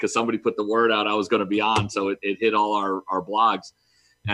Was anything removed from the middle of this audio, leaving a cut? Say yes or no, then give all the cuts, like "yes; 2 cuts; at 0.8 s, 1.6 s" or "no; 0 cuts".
no; 0 cuts